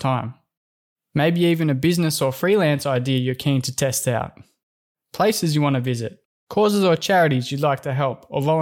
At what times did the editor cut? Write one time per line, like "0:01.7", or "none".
none